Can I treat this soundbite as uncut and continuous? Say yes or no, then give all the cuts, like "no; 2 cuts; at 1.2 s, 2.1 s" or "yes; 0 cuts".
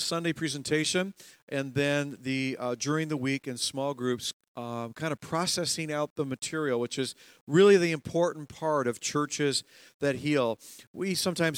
yes; 0 cuts